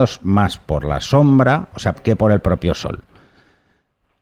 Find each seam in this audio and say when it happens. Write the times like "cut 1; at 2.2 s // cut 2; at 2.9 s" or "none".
cut 1; at 1.9 s